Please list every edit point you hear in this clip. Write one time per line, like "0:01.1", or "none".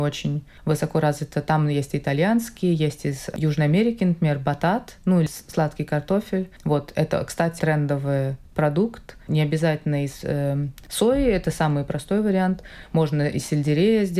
0:07.6
0:09.3